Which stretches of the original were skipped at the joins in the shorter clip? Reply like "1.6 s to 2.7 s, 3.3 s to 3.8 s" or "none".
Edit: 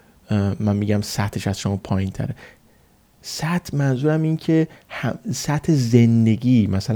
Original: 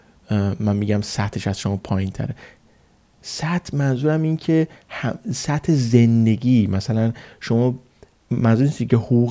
none